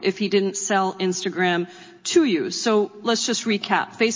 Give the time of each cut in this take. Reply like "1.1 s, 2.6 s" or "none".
none